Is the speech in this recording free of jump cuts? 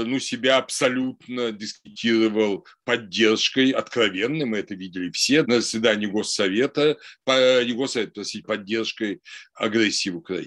no; 2 cuts; at 5.4 s, 8.4 s

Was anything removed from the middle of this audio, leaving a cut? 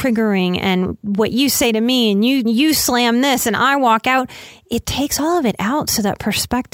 yes; 2 cuts; at 2.4 s, 4.8 s

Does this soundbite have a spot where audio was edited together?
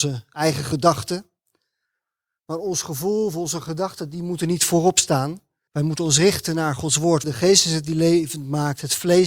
yes; 2 cuts; at 5.7 s, 7.2 s

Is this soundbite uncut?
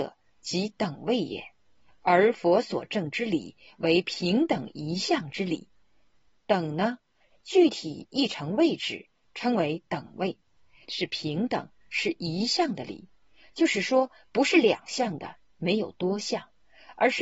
no; 2 cuts; at 7.3 s, 10.8 s

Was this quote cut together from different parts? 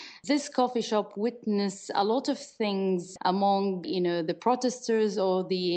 no; 0 cuts

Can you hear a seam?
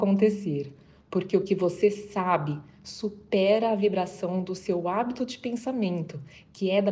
no; 0 cuts

